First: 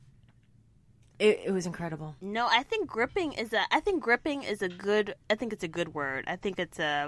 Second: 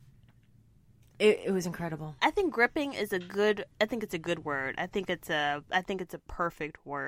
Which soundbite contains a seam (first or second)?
second